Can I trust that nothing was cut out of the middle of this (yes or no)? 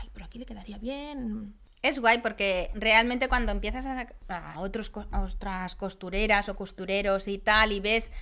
no